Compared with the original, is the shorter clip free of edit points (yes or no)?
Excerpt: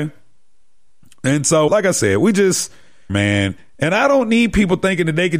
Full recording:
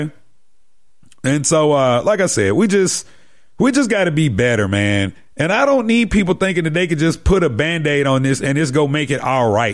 no